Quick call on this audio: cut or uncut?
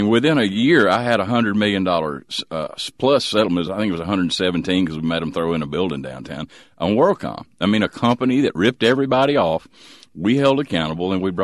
uncut